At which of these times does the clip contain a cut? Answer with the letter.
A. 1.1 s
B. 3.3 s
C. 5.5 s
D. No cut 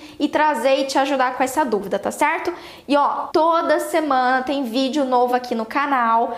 B